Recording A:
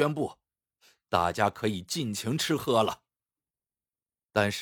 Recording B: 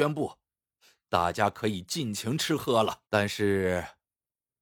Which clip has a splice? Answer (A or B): B